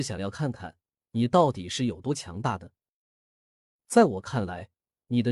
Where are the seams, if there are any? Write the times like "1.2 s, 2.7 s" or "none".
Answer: 3.8 s